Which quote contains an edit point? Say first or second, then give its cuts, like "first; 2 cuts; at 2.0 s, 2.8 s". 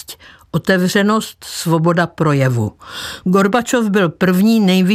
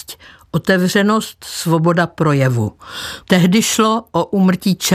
second; 1 cut; at 3.2 s